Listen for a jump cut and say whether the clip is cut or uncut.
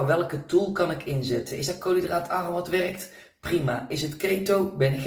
uncut